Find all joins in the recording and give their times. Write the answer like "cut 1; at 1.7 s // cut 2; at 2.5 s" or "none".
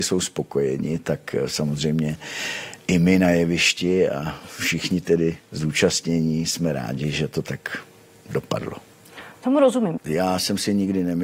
cut 1; at 10.0 s

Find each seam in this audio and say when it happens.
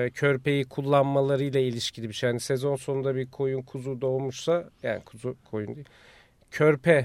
none

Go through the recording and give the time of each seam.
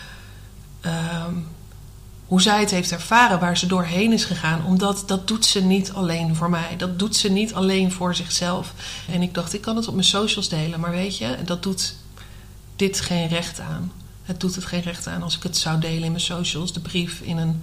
cut 1; at 9.1 s

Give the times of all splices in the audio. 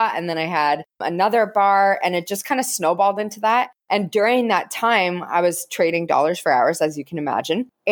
none

